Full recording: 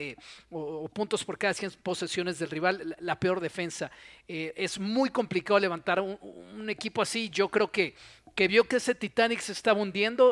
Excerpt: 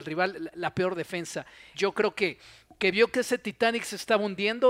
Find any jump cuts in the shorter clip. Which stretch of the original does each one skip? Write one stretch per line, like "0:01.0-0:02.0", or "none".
0:04.2-0:07.3